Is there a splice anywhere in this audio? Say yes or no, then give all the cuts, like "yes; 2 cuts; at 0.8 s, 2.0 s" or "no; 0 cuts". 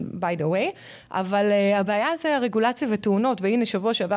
no; 0 cuts